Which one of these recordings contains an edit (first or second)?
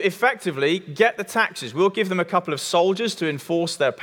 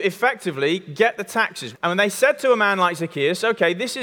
second